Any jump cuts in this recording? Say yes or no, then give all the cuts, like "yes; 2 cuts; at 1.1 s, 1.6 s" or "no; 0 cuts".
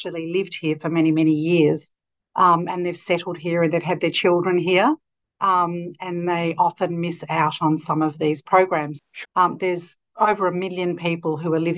yes; 1 cut; at 9.2 s